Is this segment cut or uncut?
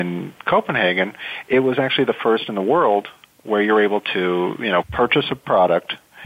cut